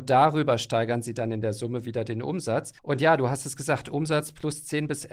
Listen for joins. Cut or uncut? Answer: cut